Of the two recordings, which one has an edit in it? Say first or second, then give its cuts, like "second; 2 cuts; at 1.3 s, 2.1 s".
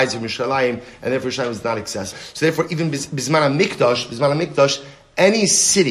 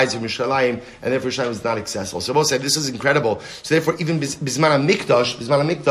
first; 1 cut; at 2.1 s